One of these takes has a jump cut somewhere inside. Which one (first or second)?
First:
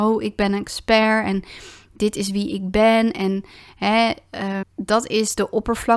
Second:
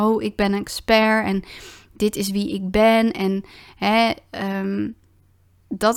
first